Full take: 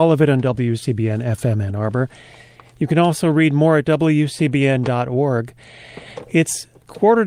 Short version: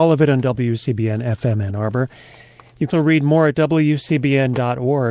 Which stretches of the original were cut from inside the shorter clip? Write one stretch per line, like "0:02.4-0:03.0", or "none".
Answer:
0:02.9-0:03.2